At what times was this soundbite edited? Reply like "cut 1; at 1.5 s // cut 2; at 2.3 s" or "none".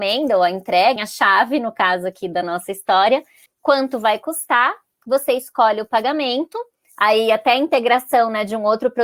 cut 1; at 1.0 s // cut 2; at 3.5 s